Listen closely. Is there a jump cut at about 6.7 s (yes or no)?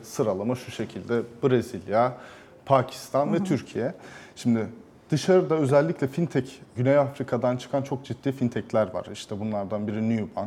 yes